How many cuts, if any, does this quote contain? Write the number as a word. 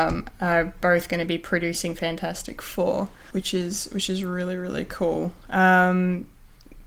one